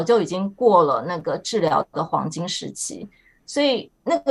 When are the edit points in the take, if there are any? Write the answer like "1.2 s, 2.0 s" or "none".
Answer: none